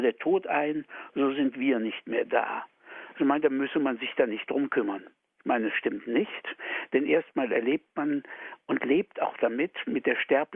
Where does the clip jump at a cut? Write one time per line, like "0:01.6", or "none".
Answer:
0:05.3